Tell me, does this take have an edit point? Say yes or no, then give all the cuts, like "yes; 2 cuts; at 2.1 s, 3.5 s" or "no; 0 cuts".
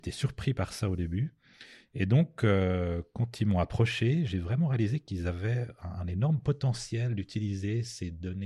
no; 0 cuts